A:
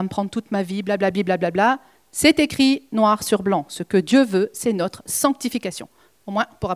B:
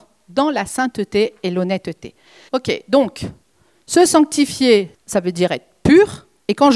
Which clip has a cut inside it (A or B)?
B